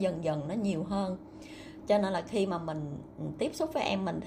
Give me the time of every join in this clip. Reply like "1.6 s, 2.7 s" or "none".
none